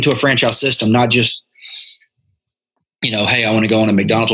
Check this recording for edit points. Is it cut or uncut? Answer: uncut